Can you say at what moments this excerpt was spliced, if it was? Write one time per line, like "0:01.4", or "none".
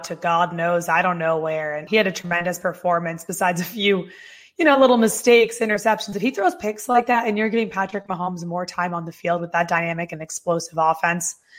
0:01.9

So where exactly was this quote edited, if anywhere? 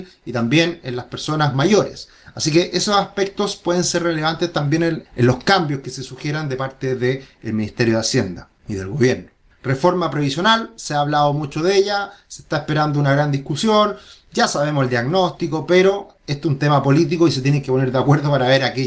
0:09.5

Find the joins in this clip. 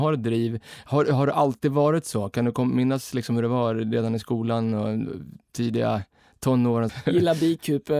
0:06.9

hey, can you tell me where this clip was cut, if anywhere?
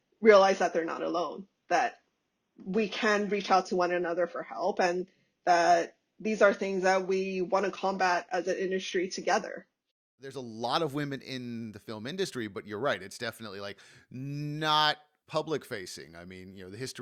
none

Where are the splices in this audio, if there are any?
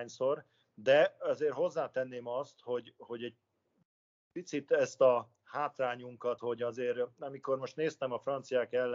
0:06.4

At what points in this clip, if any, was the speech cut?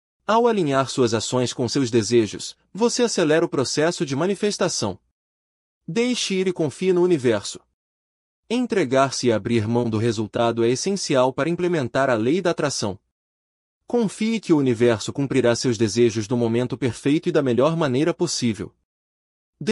none

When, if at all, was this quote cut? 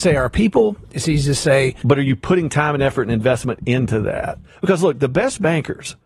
none

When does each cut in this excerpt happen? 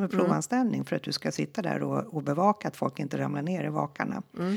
none

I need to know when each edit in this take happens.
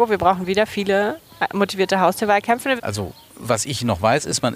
0:02.8

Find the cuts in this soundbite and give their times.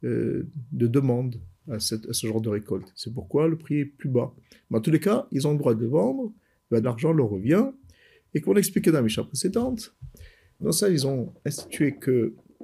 0:06.8
0:10.6

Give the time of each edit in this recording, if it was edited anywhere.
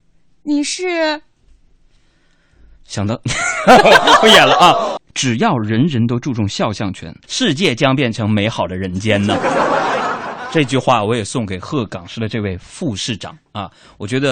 0:05.0
0:07.2

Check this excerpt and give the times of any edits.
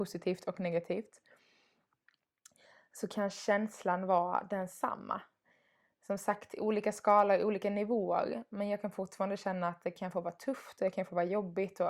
none

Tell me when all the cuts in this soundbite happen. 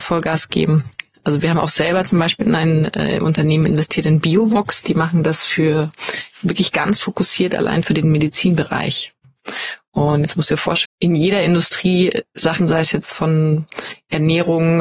0:10.9
0:12.6

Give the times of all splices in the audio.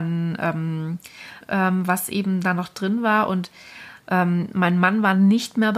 0:01.4

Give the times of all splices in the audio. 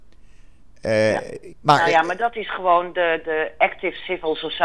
0:01.5

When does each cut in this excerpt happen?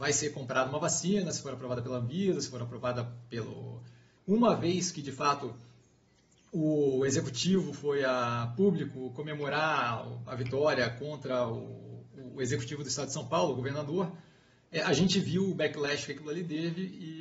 0:04.2

